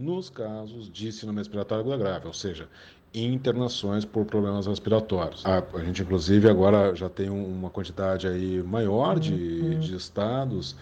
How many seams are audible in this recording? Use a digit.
0